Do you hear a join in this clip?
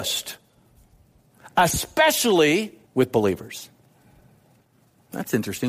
yes; 1 cut; at 2.9 s

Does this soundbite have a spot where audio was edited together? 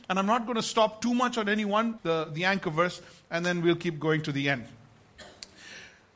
yes; 1 cut; at 2.0 s

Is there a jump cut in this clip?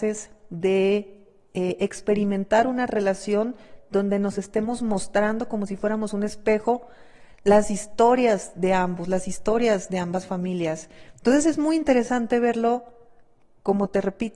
no; 0 cuts

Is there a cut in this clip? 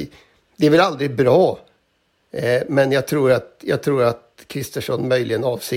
no; 0 cuts

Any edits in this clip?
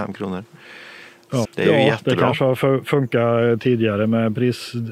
yes; 1 cut; at 1.4 s

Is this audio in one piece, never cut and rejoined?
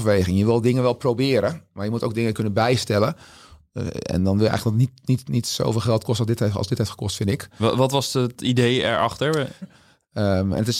no; 1 cut; at 9.6 s

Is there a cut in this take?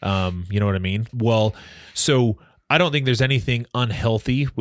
yes; 1 cut; at 1.1 s

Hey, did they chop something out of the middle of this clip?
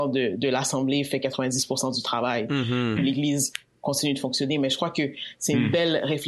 yes; 1 cut; at 3.0 s

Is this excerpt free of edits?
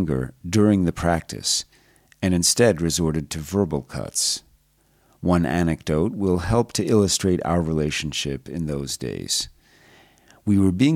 yes; 0 cuts

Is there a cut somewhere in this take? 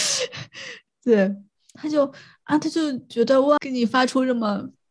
yes; 2 cuts; at 1.7 s, 3.6 s

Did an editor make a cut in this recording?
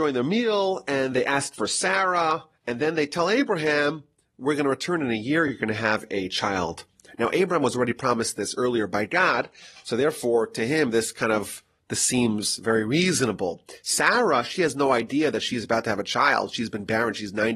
no; 0 cuts

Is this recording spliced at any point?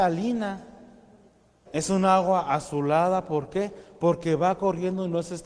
yes; 1 cut; at 1.7 s

